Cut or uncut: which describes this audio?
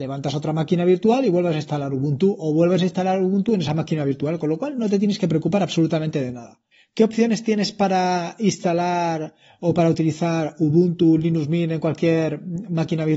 uncut